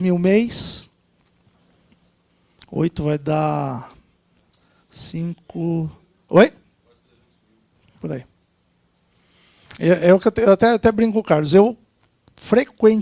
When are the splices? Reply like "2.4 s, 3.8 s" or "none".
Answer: 7.9 s